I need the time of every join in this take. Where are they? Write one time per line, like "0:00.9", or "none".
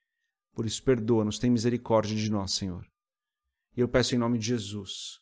none